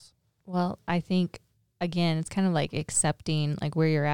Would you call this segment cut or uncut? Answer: uncut